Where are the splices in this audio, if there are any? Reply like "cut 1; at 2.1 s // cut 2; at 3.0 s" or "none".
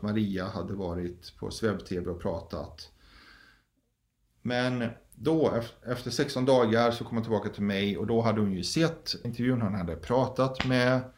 cut 1; at 9.2 s